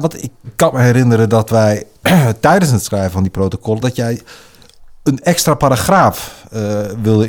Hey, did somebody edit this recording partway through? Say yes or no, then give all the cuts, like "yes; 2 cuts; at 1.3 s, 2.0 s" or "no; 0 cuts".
no; 0 cuts